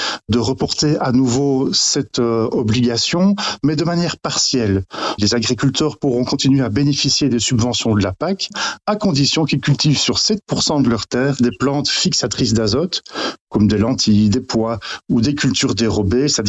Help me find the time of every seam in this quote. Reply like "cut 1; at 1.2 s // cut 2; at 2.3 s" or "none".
none